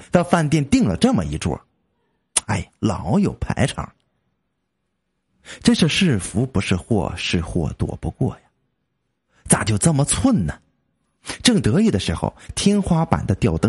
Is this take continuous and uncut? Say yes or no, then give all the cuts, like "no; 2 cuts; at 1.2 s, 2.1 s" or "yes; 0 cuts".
yes; 0 cuts